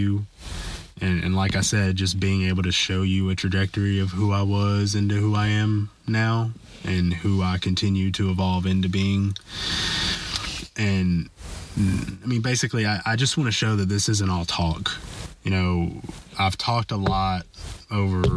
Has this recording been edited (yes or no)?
no